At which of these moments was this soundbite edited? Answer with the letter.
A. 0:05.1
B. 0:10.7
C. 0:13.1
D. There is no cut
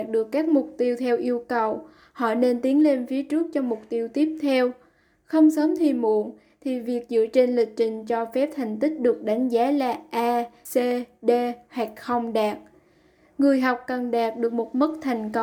B